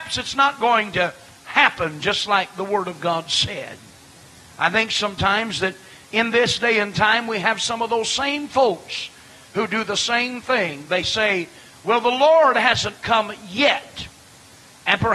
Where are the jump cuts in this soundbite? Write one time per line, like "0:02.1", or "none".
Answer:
none